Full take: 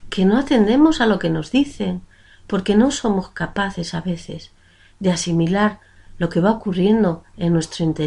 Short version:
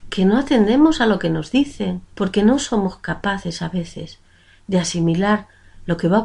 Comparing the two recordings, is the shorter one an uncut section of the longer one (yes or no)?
no